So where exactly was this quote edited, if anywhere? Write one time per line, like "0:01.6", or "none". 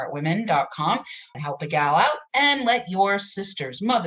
0:01.3